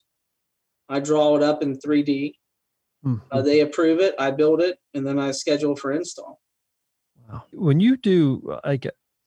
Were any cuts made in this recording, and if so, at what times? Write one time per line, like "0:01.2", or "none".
0:07.5